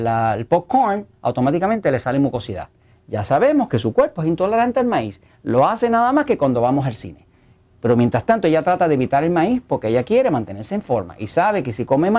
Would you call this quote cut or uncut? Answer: uncut